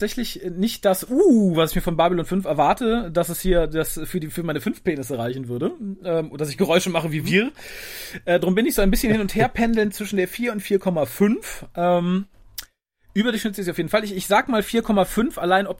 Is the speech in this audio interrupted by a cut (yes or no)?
no